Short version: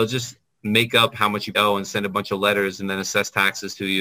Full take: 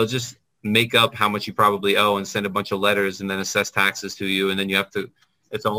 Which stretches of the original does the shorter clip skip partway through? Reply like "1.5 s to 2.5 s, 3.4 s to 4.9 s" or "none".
1.5 s to 2.0 s